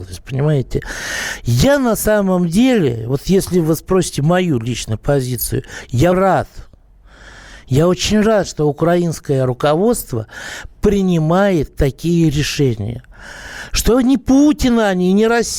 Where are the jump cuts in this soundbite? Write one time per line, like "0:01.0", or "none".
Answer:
0:06.1

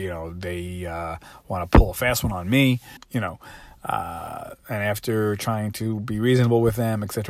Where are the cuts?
0:03.0

